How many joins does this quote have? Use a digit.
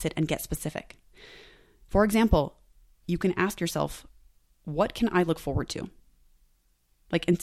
1